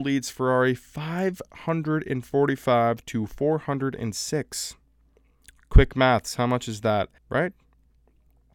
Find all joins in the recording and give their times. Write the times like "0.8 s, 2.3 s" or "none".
7.2 s